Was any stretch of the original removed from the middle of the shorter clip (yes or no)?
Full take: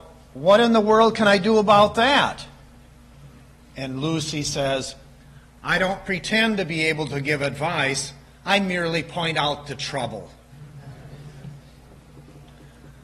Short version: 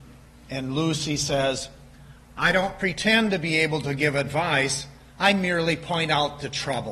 no